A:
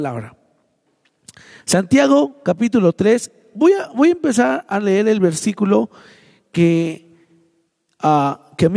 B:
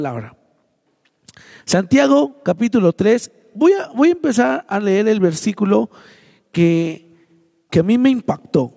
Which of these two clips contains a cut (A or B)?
B